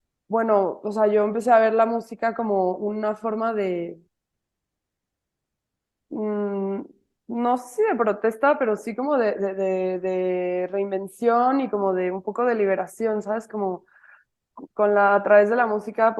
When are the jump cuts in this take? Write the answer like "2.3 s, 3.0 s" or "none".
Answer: none